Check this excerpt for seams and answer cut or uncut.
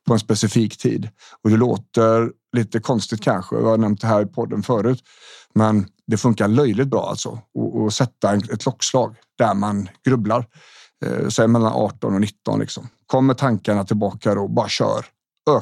uncut